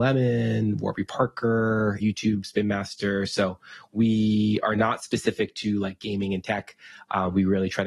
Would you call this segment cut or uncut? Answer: cut